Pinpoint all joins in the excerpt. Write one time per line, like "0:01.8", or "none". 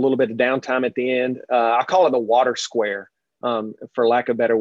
none